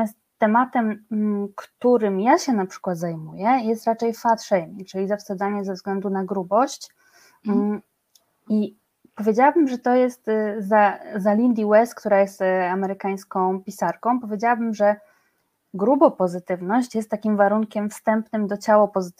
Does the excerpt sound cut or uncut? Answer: uncut